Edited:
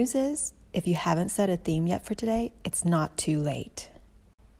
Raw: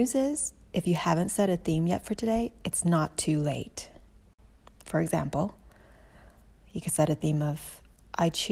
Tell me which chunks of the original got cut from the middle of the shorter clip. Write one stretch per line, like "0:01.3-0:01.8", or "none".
none